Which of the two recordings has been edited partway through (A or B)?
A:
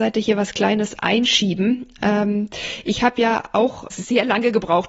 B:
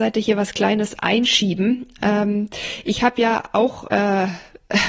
A